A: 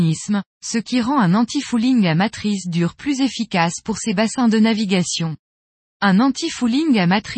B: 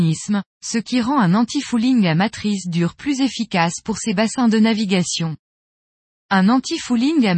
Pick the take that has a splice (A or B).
A